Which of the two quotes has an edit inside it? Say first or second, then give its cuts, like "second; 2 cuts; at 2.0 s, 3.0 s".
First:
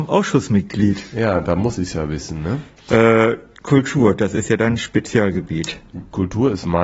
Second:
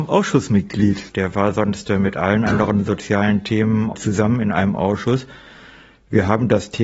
second; 2 cuts; at 1.1 s, 3.9 s